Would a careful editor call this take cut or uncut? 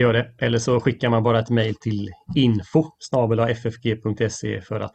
uncut